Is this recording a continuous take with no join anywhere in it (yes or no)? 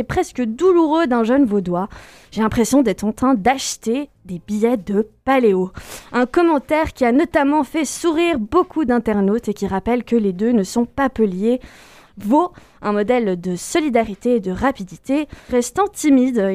no